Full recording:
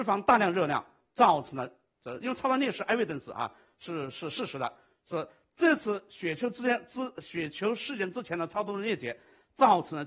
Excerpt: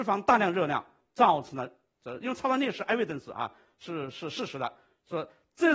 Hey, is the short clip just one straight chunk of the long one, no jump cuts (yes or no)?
yes